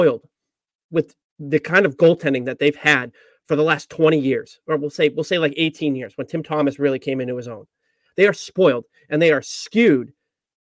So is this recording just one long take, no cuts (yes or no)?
yes